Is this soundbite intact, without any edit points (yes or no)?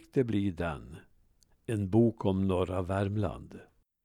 yes